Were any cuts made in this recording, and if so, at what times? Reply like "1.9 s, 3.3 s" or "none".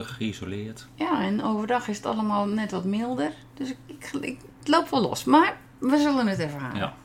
none